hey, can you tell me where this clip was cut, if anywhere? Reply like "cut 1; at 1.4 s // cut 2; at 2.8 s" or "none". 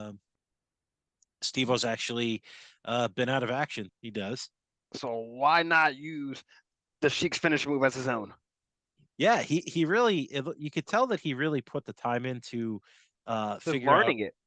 cut 1; at 3.9 s